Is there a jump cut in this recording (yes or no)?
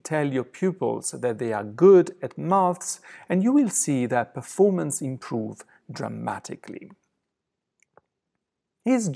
no